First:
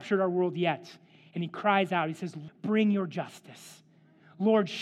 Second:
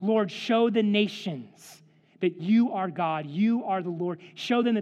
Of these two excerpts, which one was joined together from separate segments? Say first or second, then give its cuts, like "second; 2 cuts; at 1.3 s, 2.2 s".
first; 1 cut; at 2.5 s